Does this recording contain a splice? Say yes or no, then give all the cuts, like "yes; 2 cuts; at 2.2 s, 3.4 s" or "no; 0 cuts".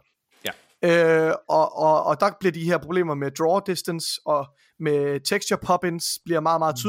no; 0 cuts